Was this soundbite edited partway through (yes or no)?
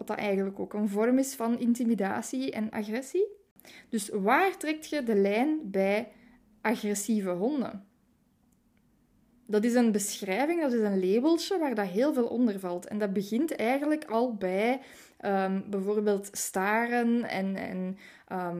no